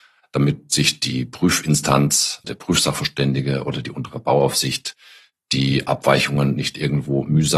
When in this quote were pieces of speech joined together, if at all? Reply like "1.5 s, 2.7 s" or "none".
2.4 s